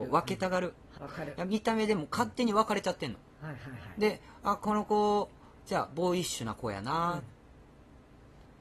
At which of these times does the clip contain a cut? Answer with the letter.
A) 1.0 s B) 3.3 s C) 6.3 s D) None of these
A